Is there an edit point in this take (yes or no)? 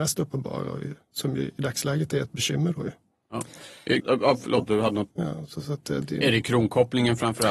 yes